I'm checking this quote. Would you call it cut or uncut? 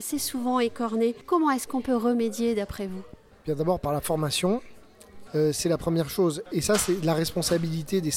cut